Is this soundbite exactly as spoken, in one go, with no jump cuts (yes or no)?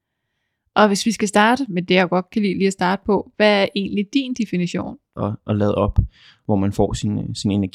no